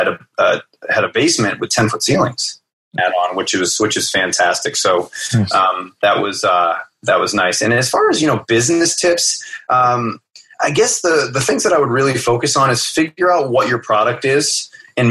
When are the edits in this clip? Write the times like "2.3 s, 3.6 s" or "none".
3.0 s, 10.5 s